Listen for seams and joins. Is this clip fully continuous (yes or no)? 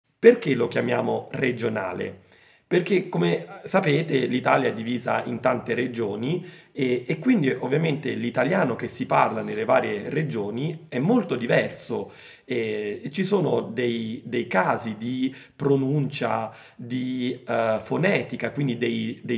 yes